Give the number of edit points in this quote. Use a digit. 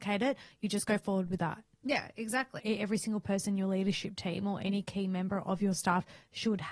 1